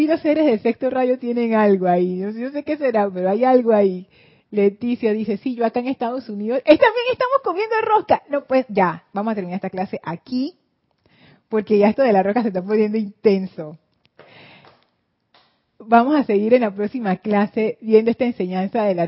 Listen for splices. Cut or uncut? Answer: uncut